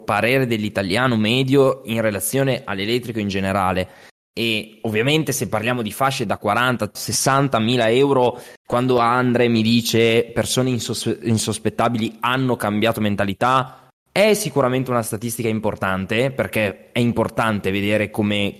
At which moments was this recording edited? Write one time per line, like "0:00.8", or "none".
0:06.9
0:08.6